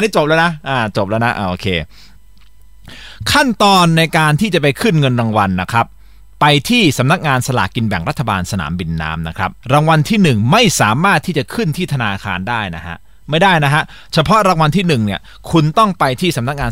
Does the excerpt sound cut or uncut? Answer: cut